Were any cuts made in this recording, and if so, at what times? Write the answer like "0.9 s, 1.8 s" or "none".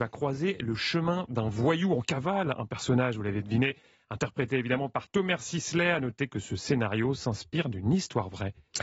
none

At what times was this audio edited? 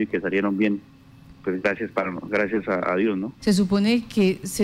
3.4 s

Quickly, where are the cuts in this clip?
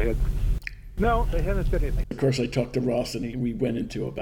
1.0 s, 2.0 s

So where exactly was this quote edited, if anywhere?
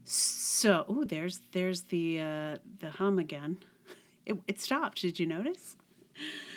none

